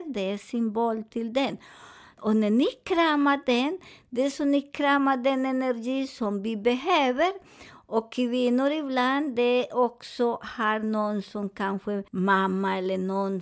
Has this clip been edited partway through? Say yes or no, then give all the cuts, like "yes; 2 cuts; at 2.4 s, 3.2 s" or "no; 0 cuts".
yes; 2 cuts; at 2.2 s, 12.1 s